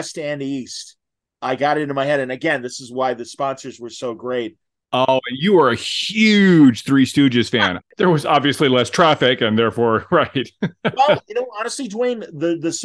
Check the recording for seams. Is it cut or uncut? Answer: cut